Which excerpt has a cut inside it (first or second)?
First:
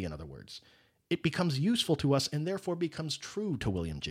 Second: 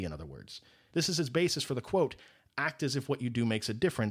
second